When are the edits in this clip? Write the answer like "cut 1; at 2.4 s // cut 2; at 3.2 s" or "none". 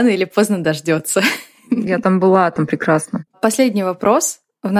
cut 1; at 3.3 s